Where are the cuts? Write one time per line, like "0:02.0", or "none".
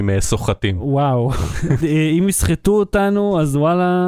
0:01.8